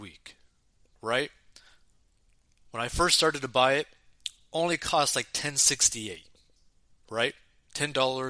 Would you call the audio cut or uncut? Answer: uncut